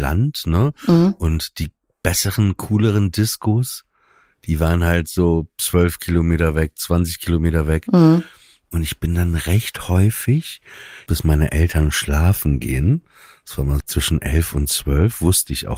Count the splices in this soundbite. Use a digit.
2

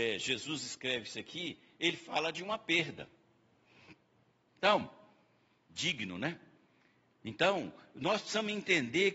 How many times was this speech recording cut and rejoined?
1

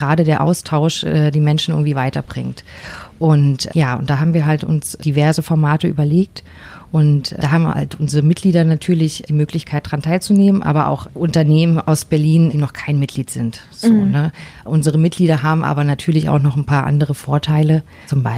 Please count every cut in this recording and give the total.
0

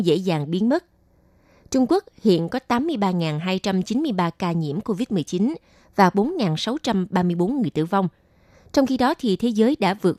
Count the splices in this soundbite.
0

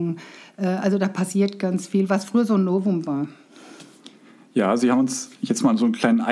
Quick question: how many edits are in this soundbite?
0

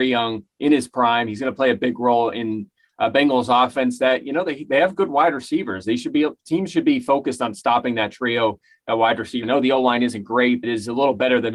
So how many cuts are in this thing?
2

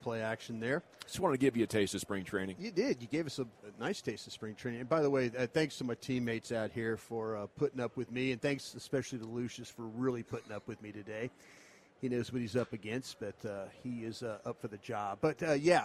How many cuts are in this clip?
0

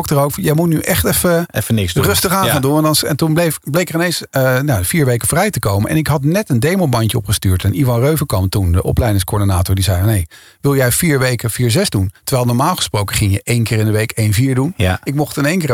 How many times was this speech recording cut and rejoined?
0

